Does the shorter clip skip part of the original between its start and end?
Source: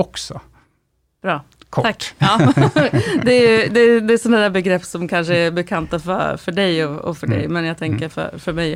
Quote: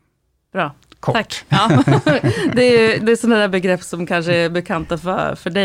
yes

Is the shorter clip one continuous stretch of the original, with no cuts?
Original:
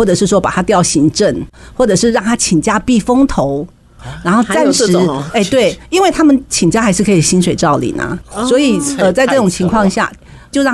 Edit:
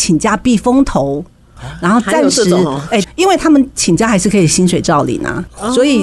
no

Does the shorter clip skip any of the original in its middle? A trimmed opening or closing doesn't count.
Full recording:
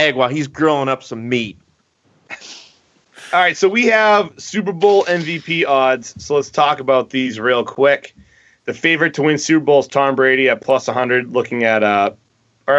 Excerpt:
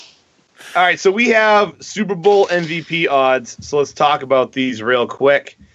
no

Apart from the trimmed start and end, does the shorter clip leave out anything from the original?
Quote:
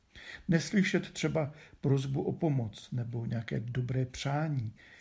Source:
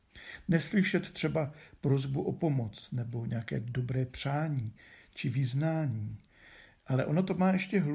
no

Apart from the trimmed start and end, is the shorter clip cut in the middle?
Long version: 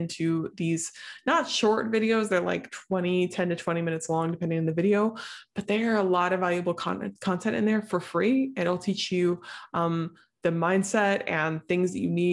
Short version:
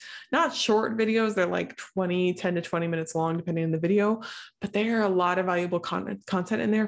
no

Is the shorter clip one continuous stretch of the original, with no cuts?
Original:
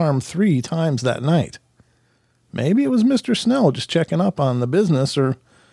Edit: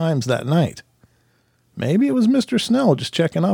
yes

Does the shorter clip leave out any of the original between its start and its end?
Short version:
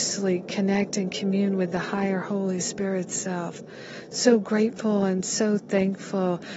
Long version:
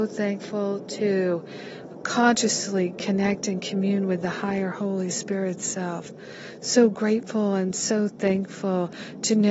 no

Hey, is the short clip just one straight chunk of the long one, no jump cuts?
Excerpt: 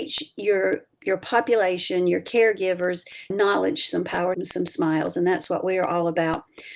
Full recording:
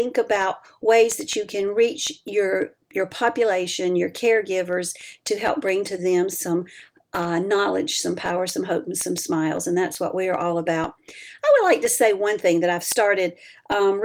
no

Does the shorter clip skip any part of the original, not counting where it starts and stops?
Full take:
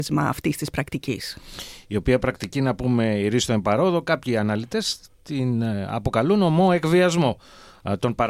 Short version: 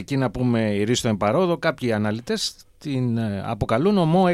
no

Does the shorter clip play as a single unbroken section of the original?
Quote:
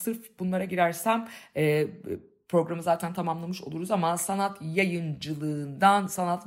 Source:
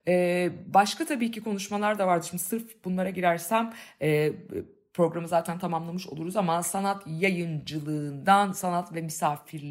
yes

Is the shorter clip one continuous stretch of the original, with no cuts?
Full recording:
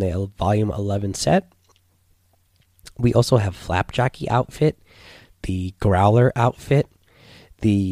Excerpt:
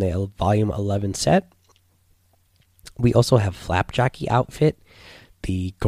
yes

